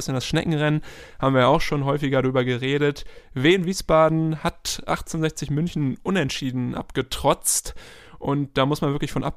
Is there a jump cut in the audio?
no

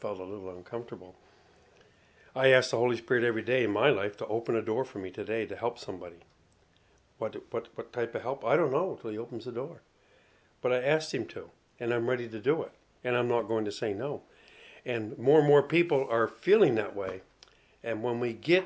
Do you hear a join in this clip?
no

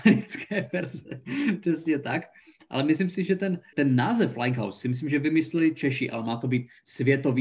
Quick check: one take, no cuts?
no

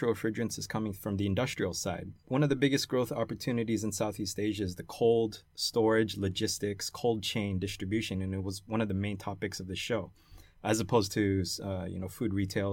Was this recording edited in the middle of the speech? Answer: no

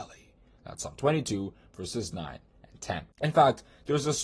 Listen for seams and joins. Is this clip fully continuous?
no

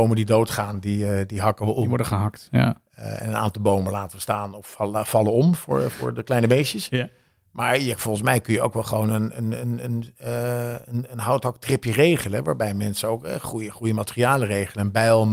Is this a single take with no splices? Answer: yes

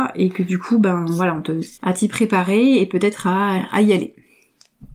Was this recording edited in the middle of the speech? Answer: yes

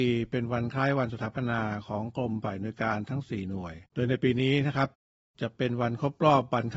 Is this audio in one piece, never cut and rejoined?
no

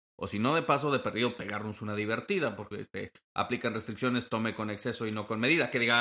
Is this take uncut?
no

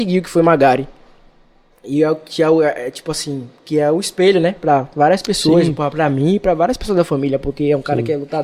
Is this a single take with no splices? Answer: yes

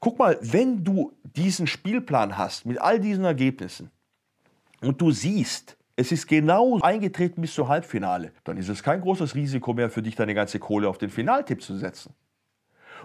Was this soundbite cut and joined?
yes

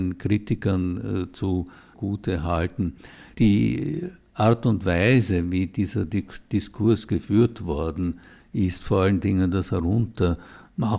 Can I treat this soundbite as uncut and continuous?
no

